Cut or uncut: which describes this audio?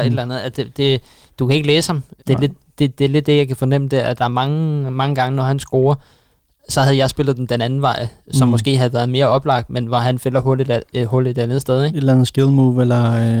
cut